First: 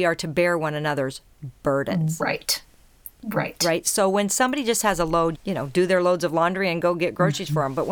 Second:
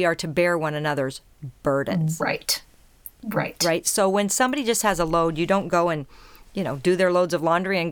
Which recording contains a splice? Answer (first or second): first